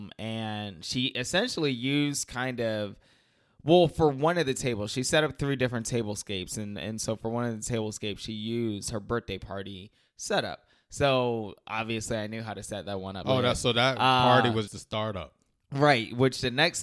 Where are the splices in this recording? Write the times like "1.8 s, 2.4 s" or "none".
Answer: 13.2 s, 14.7 s